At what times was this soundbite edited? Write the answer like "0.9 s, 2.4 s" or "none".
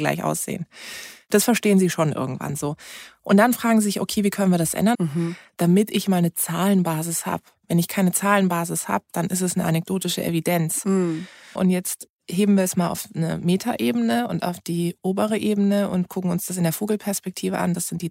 4.9 s, 11.6 s